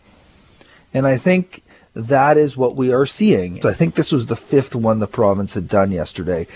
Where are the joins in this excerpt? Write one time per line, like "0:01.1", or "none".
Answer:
0:03.6